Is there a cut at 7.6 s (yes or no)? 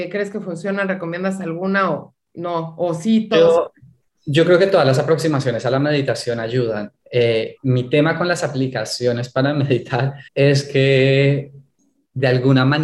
yes